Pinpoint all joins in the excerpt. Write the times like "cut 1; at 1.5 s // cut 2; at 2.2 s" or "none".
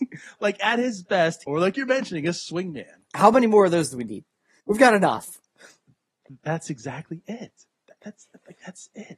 cut 1; at 1.4 s // cut 2; at 4.6 s